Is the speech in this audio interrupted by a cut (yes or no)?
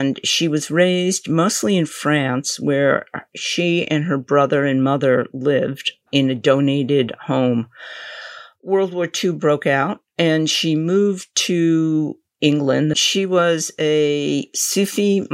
yes